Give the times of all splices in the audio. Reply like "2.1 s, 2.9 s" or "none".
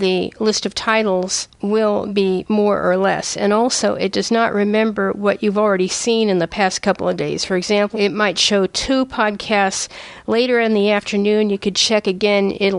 7.9 s

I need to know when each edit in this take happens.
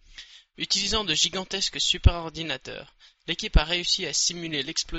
none

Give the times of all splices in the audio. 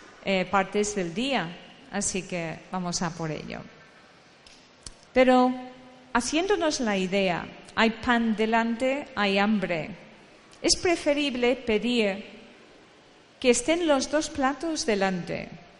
5.1 s

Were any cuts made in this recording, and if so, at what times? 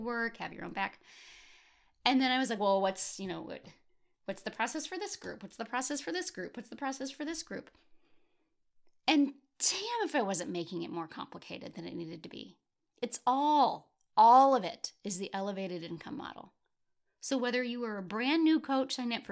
none

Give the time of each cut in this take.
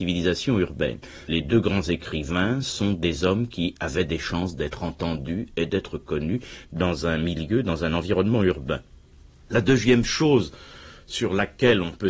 1.3 s

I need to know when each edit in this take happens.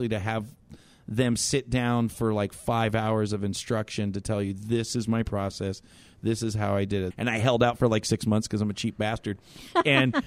7.1 s

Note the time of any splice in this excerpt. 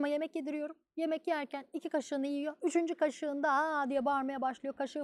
none

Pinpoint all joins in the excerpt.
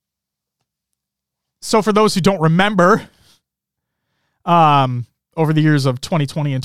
none

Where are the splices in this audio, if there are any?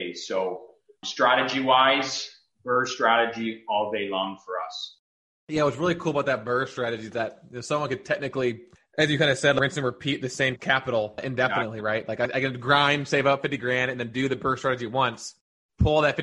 none

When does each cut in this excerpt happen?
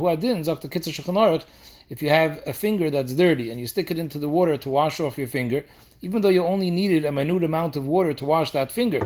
none

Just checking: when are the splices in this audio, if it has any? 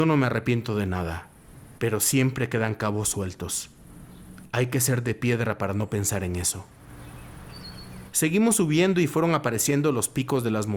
1.8 s

